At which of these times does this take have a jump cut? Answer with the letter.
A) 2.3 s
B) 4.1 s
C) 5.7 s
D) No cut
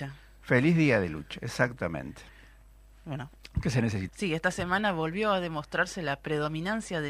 B